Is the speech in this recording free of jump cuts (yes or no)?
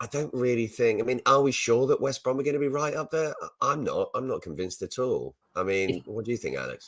yes